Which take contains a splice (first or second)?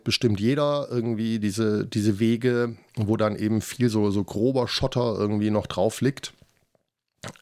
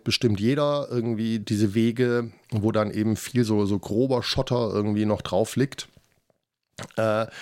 second